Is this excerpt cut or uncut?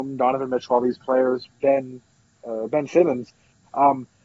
cut